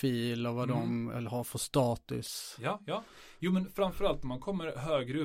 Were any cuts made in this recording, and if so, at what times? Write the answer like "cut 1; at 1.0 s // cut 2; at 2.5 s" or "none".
none